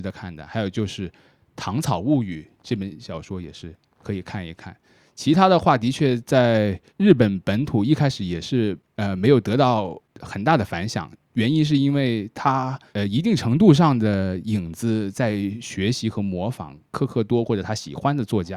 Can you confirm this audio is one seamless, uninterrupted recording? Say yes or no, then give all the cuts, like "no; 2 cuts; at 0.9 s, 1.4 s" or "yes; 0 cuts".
yes; 0 cuts